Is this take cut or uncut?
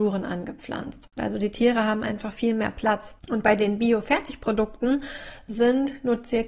cut